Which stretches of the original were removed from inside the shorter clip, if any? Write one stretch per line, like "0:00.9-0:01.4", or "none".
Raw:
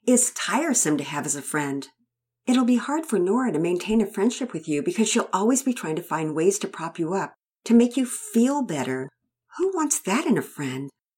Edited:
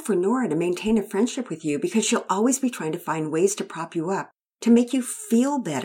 none